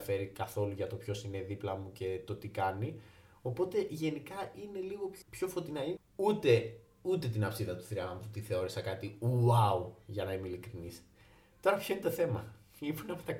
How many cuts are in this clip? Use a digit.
1